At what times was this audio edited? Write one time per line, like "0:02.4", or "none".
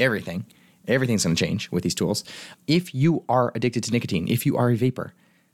0:02.5